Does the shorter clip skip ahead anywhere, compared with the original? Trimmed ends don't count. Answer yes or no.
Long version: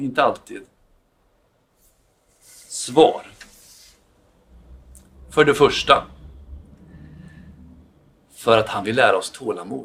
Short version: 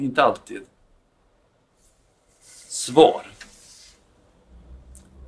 no